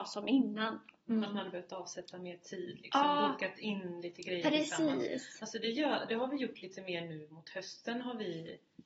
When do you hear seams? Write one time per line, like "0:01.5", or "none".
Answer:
none